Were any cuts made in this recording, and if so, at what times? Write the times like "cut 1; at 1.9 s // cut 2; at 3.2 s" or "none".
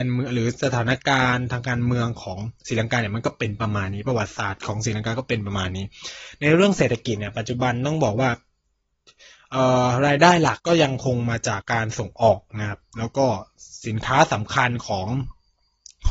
cut 1; at 10.6 s // cut 2; at 11.6 s

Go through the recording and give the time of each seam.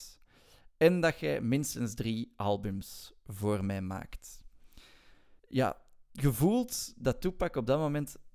cut 1; at 5.4 s

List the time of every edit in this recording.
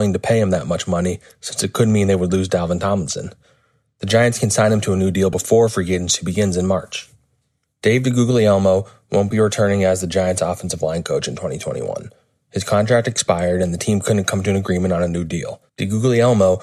cut 1; at 15.7 s

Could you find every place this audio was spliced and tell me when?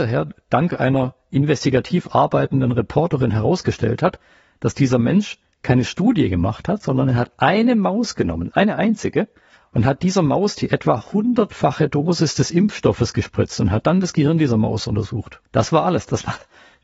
cut 1; at 15.4 s

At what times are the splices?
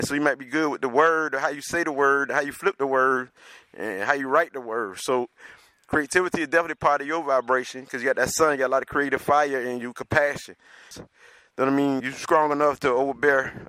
cut 1; at 10.9 s // cut 2; at 12.0 s

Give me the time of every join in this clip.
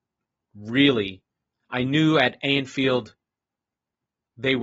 none

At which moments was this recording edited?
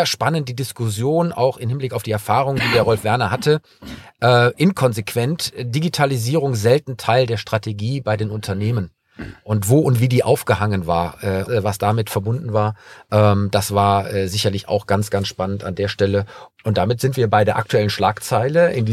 cut 1; at 11.4 s // cut 2; at 16.5 s

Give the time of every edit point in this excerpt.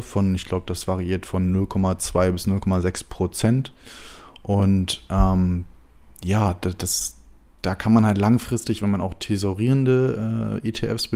none

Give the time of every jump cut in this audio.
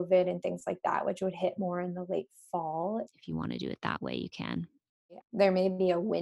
cut 1; at 3.1 s // cut 2; at 5.2 s

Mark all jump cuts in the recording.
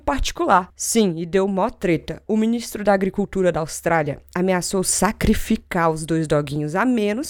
none

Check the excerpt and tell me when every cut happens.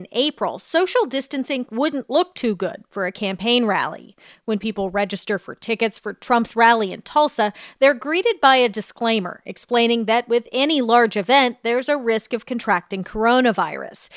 cut 1; at 1.7 s

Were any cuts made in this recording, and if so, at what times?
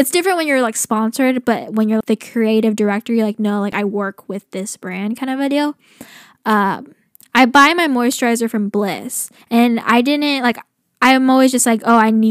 cut 1; at 2.0 s

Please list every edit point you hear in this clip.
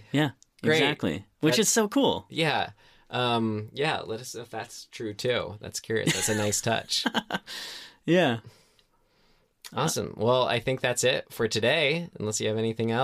none

